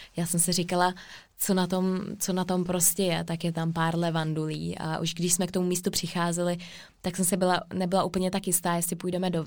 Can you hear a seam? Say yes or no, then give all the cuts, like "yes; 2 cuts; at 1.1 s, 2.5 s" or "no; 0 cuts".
no; 0 cuts